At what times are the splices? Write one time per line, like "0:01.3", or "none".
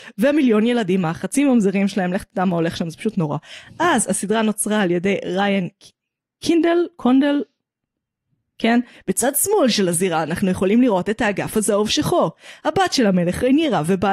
0:08.9